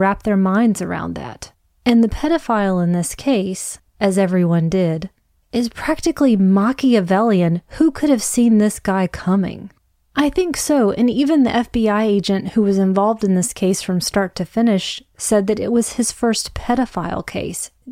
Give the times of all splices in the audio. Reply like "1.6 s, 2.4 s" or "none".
3.9 s, 10.0 s